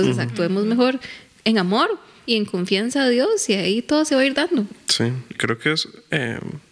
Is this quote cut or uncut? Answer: cut